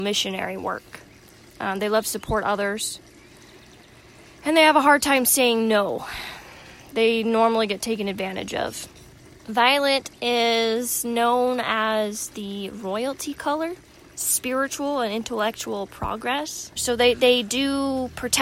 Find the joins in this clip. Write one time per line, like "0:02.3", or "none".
0:09.4
0:16.8